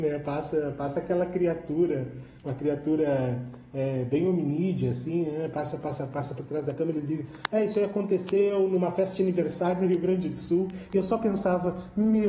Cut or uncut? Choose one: uncut